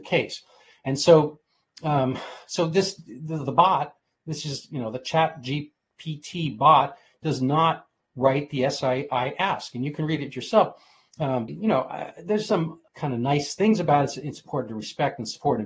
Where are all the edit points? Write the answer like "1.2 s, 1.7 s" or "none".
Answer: 11.5 s, 12.9 s